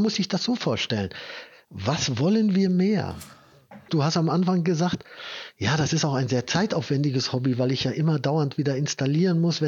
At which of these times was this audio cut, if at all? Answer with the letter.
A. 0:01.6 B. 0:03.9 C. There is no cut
B